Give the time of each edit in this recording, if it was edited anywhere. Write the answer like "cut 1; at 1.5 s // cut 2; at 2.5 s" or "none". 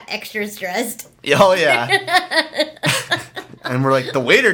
cut 1; at 3.6 s